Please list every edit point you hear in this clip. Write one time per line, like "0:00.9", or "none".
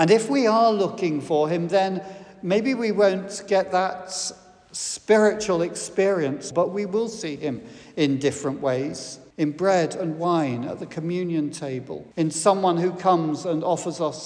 0:06.5
0:09.3
0:12.1

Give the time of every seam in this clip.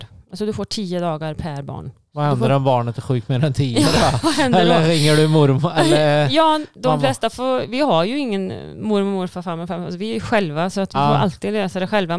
none

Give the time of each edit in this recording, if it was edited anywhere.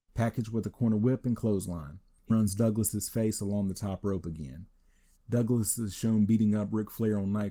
0:02.3
0:05.2

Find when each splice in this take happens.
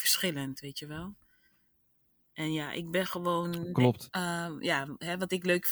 0:04.1

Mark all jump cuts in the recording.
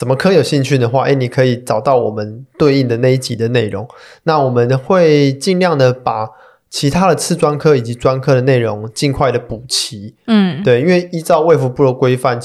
none

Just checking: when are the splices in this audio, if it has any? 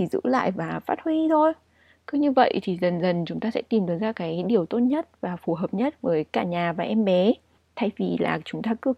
none

